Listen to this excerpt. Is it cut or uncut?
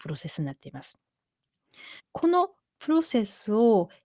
cut